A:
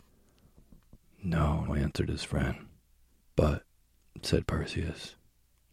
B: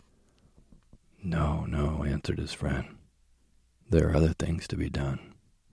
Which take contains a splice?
A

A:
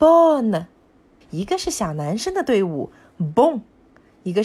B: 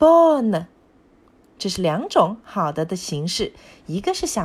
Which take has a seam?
A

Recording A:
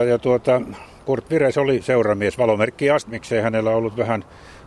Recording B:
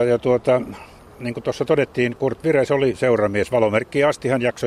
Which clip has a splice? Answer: A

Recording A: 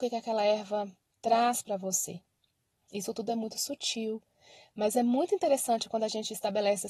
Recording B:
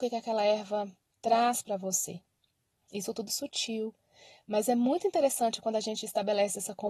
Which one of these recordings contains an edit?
B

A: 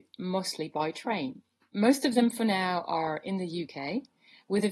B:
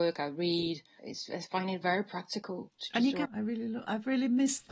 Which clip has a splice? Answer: B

